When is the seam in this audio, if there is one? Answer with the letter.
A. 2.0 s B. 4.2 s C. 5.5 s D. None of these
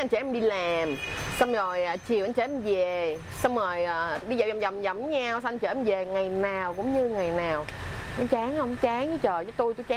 B